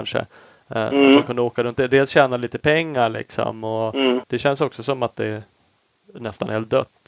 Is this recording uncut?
no; 1 cut; at 4.2 s

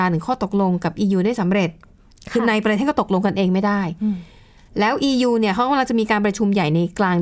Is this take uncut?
yes; 0 cuts

